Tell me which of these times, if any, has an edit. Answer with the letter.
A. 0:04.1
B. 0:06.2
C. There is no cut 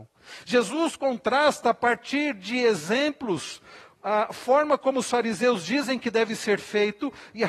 C